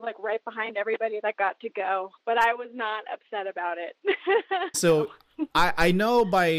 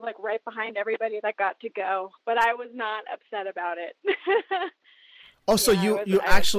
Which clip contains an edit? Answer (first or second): first